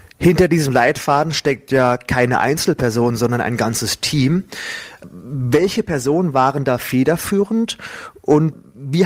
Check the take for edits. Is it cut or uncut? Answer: uncut